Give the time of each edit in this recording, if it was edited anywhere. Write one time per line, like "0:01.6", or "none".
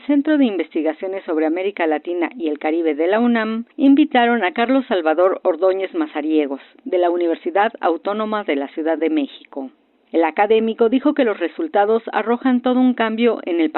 none